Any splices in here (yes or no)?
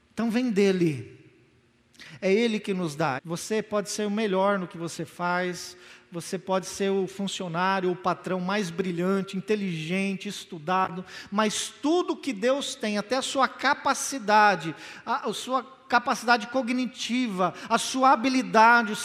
yes